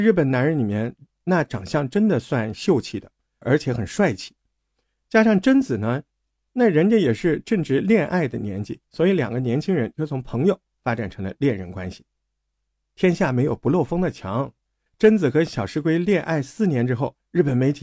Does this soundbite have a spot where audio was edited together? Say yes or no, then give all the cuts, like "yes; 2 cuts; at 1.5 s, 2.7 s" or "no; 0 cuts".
yes; 1 cut; at 3.4 s